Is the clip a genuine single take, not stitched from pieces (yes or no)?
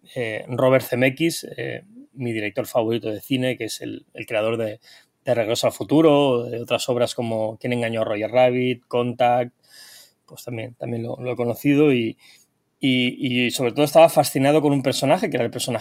yes